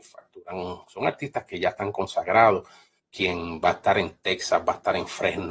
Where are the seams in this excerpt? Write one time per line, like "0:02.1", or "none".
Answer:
0:03.0